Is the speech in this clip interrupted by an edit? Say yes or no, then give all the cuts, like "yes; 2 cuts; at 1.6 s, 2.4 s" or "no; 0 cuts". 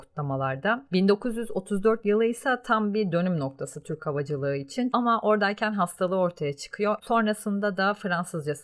yes; 2 cuts; at 4.9 s, 7.0 s